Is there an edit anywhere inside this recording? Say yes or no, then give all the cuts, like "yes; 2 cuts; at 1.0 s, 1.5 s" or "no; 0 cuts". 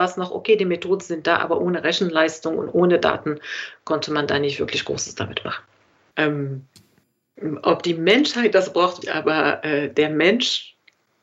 yes; 2 cuts; at 6.1 s, 9.0 s